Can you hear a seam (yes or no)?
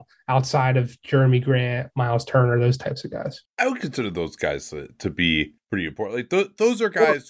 no